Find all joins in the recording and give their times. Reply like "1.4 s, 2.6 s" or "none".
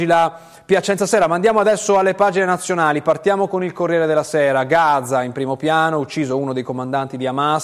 none